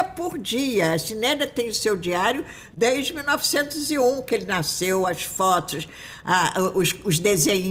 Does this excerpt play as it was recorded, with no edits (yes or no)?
yes